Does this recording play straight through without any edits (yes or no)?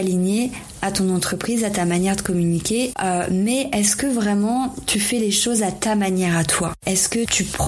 no